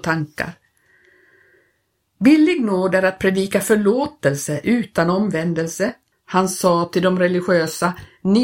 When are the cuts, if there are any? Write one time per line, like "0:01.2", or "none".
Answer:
0:06.1